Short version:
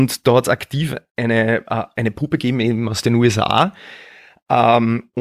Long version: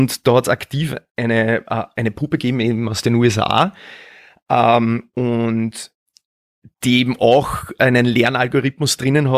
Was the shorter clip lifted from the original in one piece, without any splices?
yes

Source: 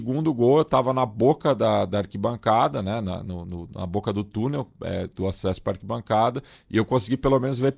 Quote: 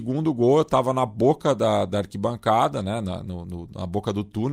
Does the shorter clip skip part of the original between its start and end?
no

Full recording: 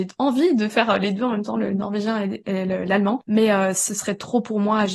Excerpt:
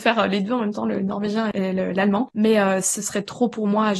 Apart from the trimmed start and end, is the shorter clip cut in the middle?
yes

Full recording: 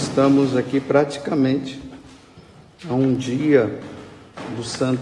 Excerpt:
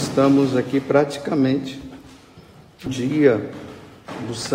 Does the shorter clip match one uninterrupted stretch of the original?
no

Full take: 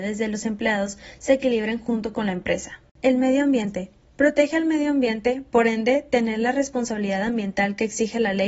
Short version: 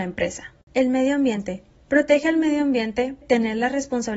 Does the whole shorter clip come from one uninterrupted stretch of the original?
no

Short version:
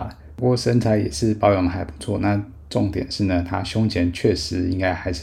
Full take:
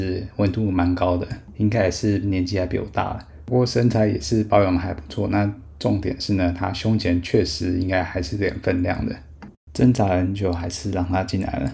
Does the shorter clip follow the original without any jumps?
yes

